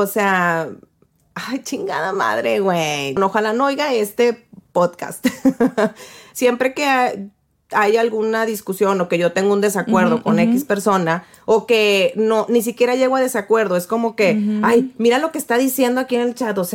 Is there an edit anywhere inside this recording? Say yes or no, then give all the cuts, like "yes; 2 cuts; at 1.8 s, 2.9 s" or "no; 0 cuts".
yes; 1 cut; at 3.2 s